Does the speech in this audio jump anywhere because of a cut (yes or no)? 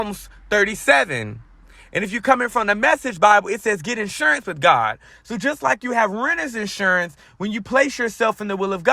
no